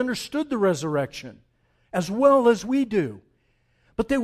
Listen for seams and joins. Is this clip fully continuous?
yes; 0 cuts

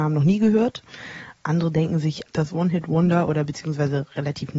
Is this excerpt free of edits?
no; 1 cut; at 2.3 s

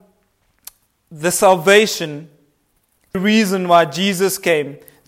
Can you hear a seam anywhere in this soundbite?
yes; 1 cut; at 3.1 s

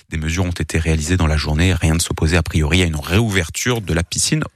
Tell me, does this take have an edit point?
no; 0 cuts

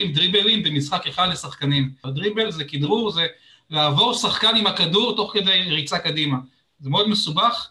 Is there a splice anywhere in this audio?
yes; 1 cut; at 2.0 s

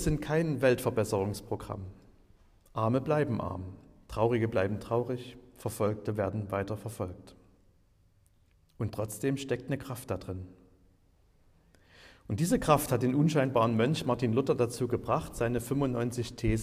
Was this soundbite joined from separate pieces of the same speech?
no; 0 cuts

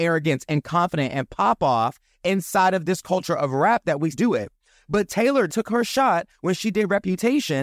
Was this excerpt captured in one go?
no; 2 cuts; at 4.1 s, 5.5 s

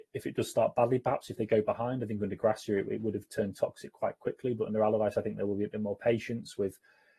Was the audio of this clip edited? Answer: no; 0 cuts

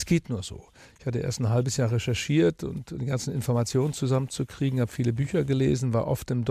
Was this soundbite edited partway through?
no; 0 cuts

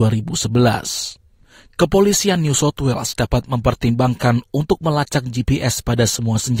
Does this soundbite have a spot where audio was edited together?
no; 0 cuts

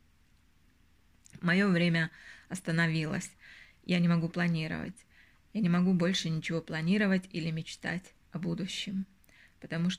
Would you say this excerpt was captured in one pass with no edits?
yes; 0 cuts

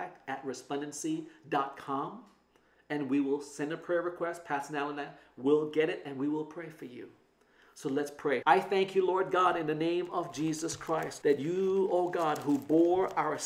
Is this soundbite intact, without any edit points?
no; 2 cuts; at 8.4 s, 11.2 s

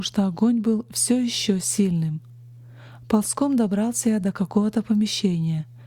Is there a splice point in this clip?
no; 0 cuts

